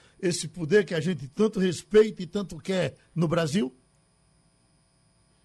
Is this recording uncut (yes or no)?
yes